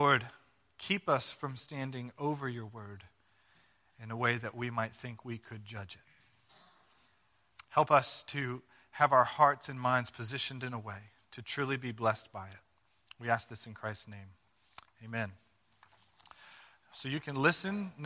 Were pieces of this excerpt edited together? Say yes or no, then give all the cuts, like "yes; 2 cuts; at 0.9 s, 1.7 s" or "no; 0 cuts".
no; 0 cuts